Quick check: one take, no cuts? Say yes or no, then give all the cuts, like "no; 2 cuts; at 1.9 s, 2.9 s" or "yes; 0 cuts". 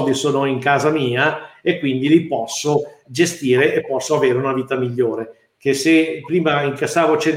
no; 1 cut; at 5.6 s